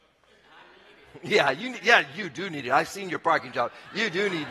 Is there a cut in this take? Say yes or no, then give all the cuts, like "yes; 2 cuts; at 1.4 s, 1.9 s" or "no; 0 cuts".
no; 0 cuts